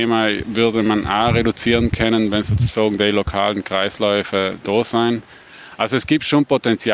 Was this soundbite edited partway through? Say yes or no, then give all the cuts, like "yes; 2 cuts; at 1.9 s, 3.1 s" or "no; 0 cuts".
no; 0 cuts